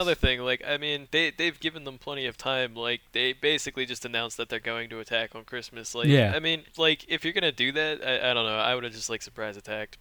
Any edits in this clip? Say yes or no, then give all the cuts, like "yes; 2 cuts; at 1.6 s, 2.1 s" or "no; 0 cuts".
yes; 1 cut; at 6.7 s